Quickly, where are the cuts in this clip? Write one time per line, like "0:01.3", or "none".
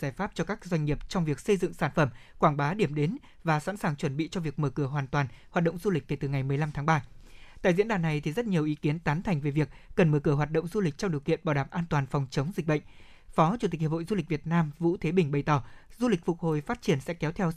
none